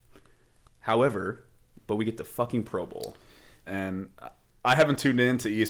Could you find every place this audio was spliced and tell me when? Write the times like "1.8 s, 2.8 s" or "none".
1.7 s, 3.7 s